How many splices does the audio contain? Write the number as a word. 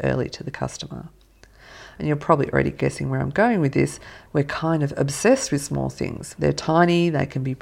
three